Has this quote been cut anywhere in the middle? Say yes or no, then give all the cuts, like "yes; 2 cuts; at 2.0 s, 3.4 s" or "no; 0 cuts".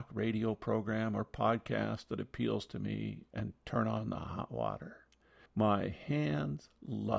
yes; 1 cut; at 5.5 s